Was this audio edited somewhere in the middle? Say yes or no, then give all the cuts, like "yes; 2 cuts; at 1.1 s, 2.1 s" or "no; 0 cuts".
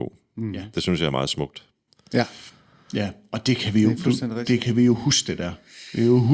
no; 0 cuts